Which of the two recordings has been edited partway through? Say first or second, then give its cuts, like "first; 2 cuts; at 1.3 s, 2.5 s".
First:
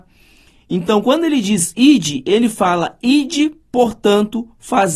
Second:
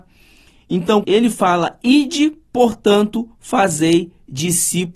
second; 1 cut; at 1.0 s